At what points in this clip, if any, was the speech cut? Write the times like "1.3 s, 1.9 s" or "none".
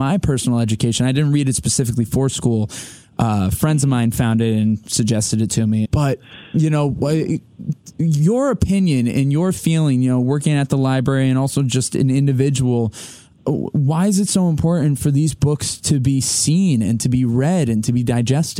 5.8 s

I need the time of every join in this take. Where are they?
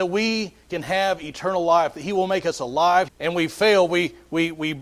3.1 s

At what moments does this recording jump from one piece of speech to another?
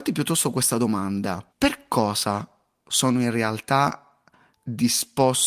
1.5 s

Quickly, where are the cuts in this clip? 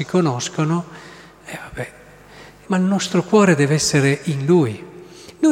2.6 s

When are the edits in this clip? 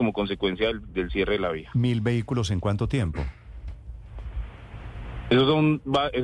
none

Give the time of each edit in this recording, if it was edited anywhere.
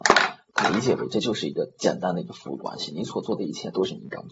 none

